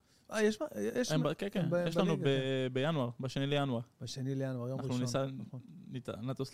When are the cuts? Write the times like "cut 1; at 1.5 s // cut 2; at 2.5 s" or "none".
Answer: cut 1; at 3.9 s